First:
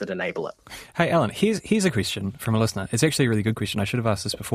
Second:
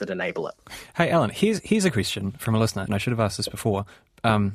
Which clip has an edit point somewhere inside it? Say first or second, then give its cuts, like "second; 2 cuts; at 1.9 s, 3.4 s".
second; 1 cut; at 2.9 s